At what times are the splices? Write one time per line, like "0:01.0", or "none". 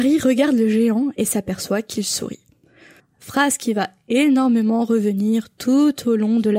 0:03.0